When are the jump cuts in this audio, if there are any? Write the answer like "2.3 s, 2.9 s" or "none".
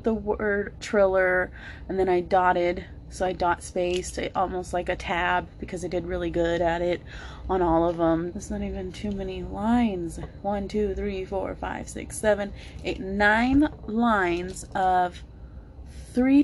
8.3 s

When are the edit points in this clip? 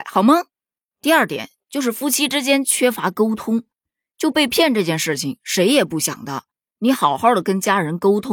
none

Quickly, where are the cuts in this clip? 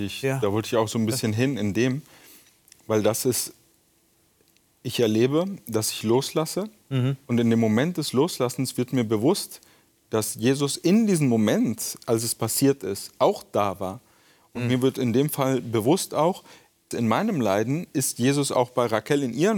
16.9 s

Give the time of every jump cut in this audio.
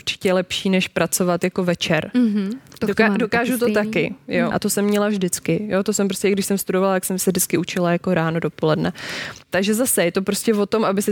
4.5 s

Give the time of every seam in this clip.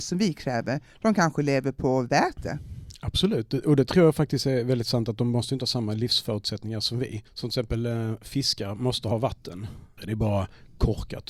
7.3 s, 10.0 s

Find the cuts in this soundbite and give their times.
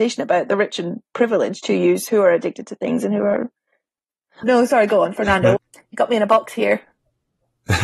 4.4 s, 5.6 s

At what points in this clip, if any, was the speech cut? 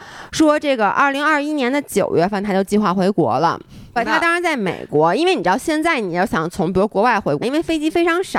4.0 s, 7.4 s

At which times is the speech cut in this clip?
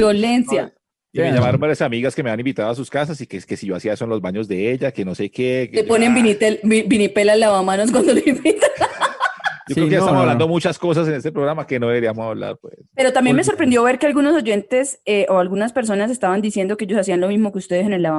none

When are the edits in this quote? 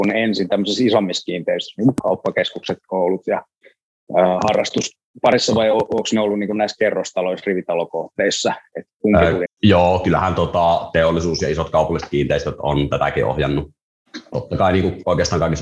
9.5 s, 14.3 s

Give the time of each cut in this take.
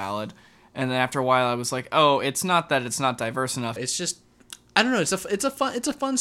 3.8 s

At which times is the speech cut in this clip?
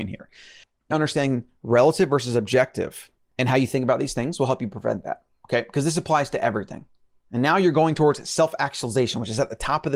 0.9 s, 7.3 s

